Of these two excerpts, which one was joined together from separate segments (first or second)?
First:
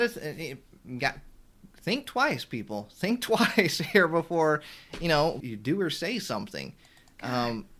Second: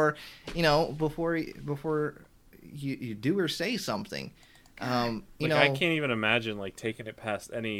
first